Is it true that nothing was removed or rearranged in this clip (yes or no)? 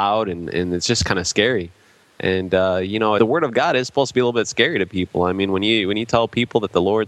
no